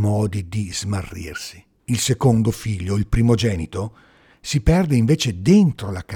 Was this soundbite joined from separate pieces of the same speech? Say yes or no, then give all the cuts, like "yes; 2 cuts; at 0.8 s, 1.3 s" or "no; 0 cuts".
yes; 1 cut; at 1.8 s